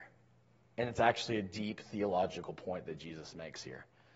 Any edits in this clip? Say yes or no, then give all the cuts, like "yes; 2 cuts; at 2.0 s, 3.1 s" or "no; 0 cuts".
no; 0 cuts